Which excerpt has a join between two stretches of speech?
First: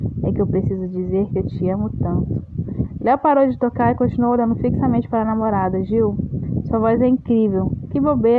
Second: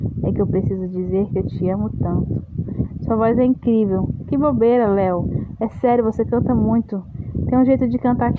second; 1 cut; at 3.0 s

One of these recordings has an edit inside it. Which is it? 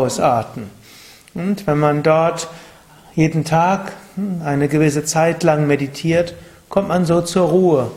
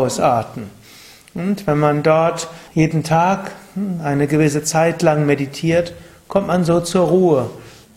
second; 1 cut; at 2.7 s

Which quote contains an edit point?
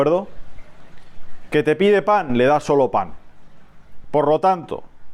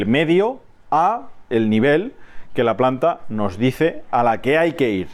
first; 1 cut; at 4.0 s

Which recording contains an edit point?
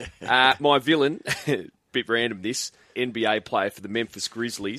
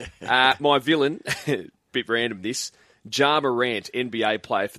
first; 1 cut; at 2.9 s

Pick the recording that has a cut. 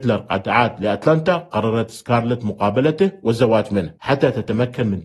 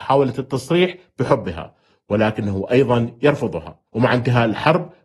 second; 1 cut; at 3.9 s

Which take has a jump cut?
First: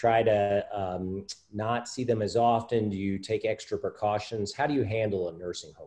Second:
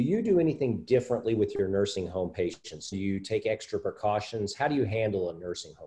second; 1 cut; at 2.9 s

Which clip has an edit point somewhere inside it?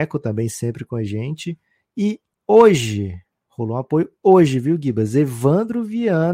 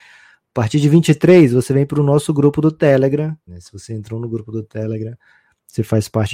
second; 1 cut; at 3.5 s

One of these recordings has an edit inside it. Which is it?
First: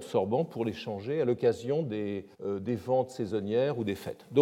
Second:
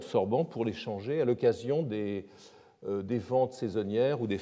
first; 1 cut; at 2.3 s

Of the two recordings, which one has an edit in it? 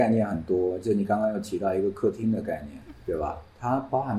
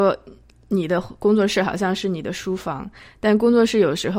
first; 1 cut; at 2.9 s

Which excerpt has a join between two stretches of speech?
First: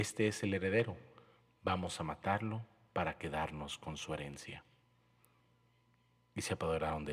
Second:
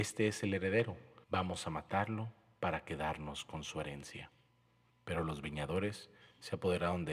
second; 2 cuts; at 1.2 s, 4.9 s

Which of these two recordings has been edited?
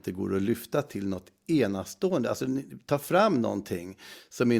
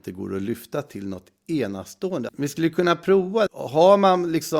second; 2 cuts; at 2.3 s, 3.5 s

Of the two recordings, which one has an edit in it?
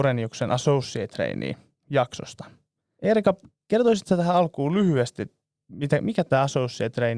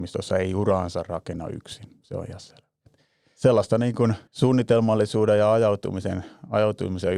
second; 2 cuts; at 2.9 s, 4.3 s

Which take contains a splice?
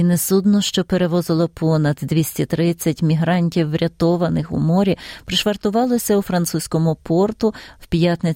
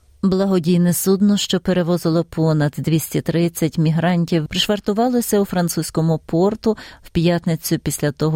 second; 1 cut; at 4.5 s

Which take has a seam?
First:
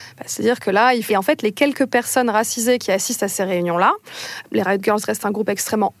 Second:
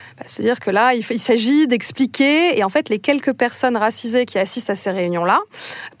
first; 2 cuts; at 1.1 s, 4.5 s

